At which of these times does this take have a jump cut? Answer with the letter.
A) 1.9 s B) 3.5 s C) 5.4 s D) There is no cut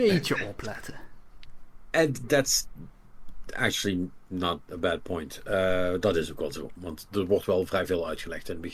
D